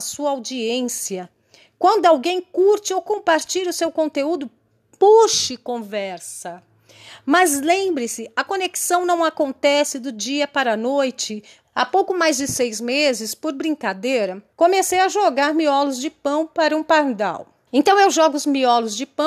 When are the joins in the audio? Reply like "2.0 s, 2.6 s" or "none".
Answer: 11.6 s, 14.5 s, 17.7 s